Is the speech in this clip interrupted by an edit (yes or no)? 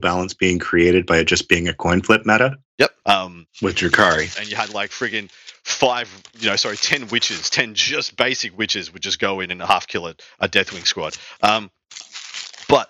yes